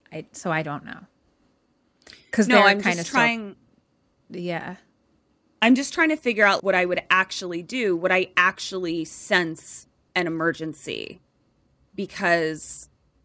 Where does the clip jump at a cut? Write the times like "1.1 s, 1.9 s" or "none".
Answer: 6.6 s